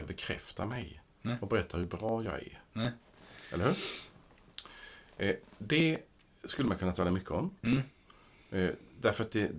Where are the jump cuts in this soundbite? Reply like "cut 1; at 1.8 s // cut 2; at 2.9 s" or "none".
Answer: none